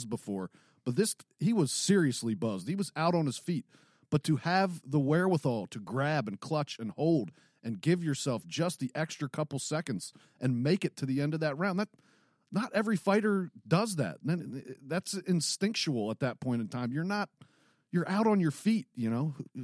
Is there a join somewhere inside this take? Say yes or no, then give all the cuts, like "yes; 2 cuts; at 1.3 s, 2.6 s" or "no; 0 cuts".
no; 0 cuts